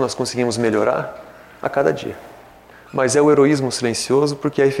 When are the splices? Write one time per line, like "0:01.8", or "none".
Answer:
0:02.7